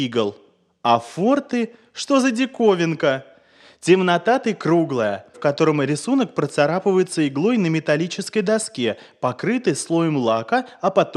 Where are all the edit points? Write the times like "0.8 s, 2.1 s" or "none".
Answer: 5.3 s